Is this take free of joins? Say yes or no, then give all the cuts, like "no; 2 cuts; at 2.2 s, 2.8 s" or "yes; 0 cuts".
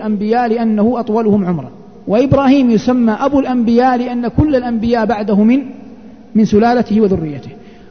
yes; 0 cuts